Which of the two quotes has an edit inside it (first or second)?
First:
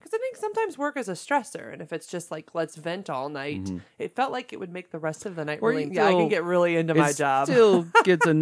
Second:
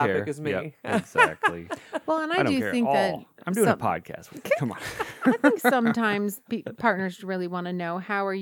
first